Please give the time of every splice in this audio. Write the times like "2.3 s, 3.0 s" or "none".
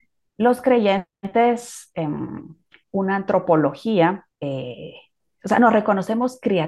2.8 s, 4.3 s